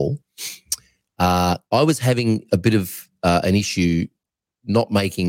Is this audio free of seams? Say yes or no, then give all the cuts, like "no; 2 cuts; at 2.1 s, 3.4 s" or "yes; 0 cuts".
no; 1 cut; at 1.6 s